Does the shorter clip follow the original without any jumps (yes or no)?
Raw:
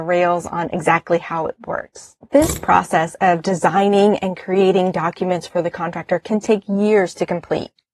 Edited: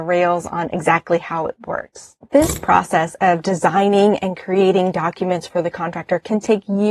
yes